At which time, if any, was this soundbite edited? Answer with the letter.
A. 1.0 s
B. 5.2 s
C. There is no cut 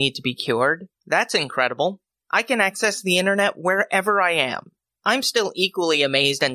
A